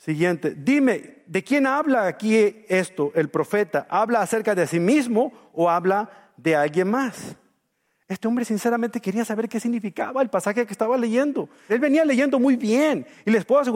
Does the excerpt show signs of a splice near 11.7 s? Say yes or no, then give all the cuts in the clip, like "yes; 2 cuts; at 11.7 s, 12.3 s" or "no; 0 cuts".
yes; 1 cut; at 11.7 s